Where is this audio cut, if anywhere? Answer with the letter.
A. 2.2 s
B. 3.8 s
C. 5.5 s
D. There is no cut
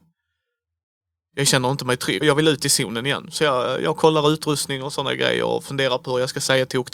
A